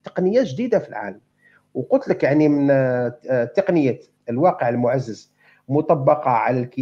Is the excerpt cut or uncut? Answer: uncut